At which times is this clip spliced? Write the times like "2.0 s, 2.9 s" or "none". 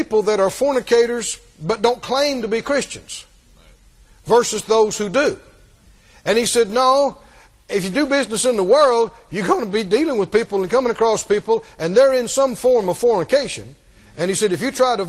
none